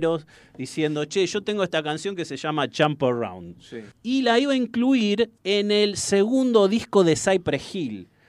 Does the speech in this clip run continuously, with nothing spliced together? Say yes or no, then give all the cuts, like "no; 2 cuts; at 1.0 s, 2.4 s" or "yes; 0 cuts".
no; 2 cuts; at 3.9 s, 5.4 s